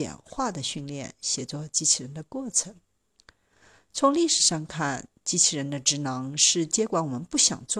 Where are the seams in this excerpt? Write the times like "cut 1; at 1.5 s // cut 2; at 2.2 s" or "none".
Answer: none